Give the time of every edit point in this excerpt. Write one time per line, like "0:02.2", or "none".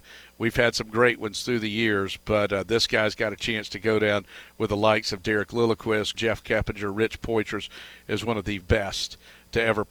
0:06.1
0:08.6